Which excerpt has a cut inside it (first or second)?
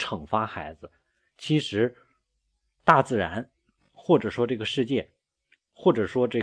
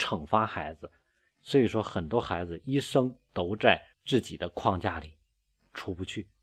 second